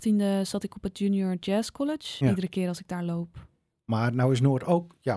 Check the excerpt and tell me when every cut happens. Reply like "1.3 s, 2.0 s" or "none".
2.2 s